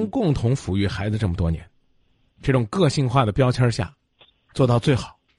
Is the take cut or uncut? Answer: cut